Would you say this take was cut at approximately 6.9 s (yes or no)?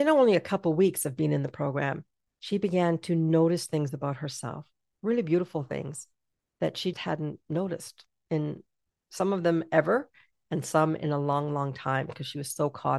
yes